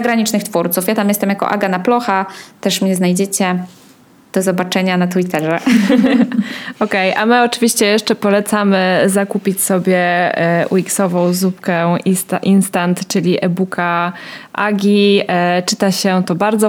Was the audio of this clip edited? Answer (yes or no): no